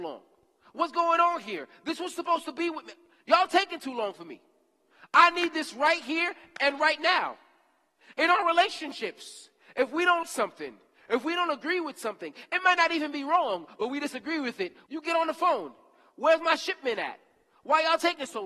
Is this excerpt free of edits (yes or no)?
no